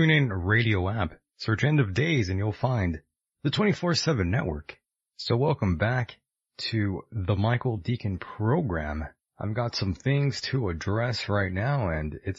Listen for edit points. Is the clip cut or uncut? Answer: cut